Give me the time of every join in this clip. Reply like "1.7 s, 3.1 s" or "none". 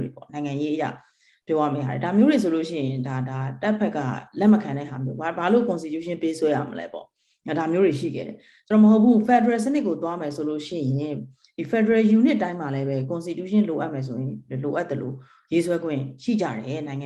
none